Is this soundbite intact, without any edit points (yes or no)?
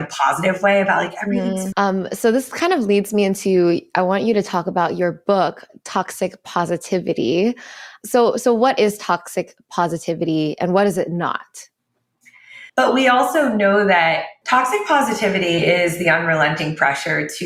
no